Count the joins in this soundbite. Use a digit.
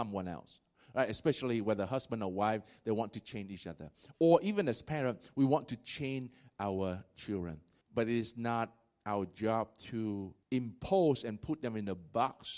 2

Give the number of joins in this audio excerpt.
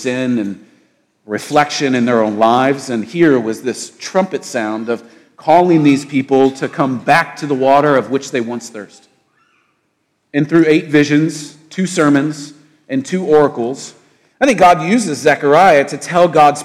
0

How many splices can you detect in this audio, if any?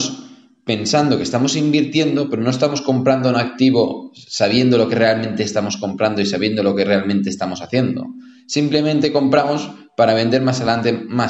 0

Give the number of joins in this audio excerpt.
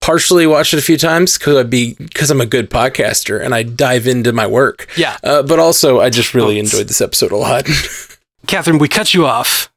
0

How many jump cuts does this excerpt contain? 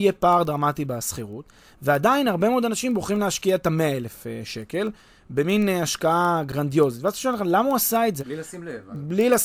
1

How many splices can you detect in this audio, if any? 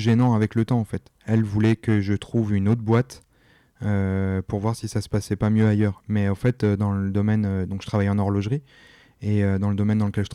1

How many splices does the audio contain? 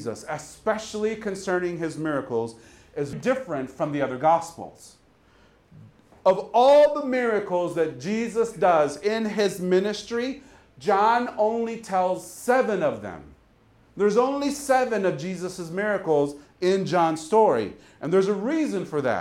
1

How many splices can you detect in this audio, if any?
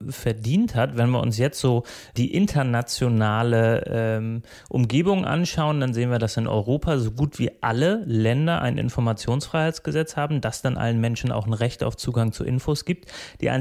0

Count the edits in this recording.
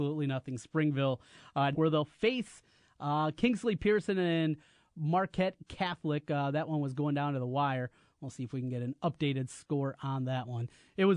1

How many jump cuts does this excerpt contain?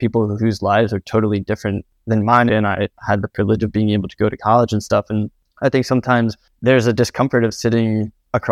1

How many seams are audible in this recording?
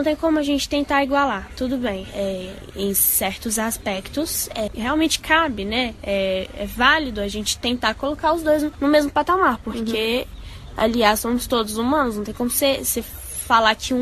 1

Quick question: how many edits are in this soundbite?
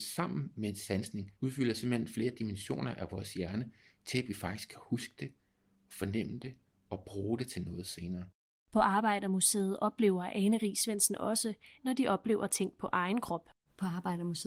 1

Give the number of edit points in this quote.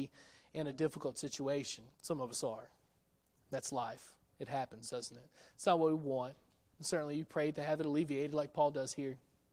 1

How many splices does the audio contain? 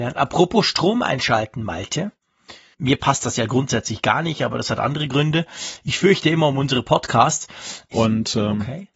2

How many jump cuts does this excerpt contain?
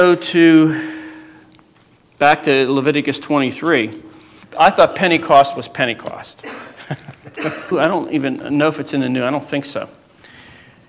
2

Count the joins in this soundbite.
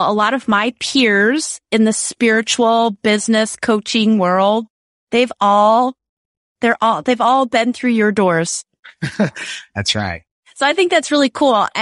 0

